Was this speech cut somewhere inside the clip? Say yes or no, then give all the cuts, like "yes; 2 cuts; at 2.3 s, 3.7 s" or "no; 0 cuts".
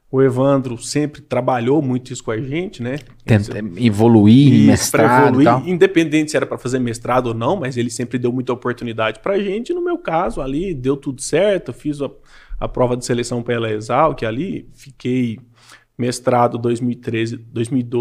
no; 0 cuts